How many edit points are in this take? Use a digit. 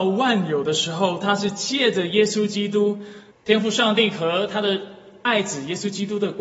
1